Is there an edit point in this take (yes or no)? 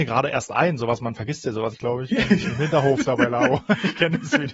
yes